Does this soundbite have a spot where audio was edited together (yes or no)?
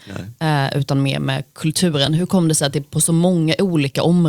no